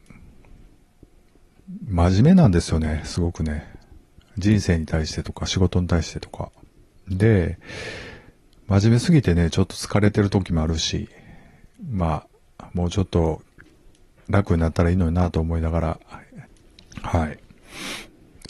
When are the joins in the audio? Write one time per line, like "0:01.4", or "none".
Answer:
none